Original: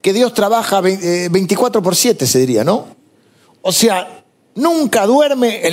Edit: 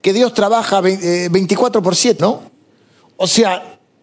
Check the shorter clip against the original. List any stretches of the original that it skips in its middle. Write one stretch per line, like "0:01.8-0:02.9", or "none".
0:02.2-0:02.6